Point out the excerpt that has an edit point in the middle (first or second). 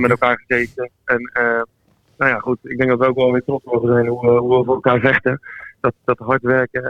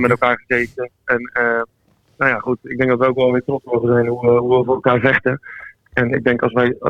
first